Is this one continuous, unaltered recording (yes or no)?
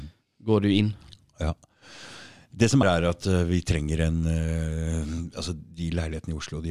no